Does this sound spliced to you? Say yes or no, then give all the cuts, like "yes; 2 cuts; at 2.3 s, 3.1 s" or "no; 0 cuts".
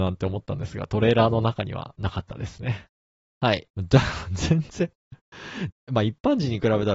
yes; 2 cuts; at 3.7 s, 5.7 s